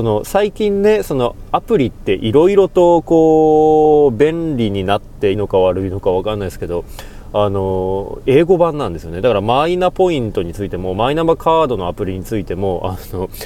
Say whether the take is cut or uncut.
cut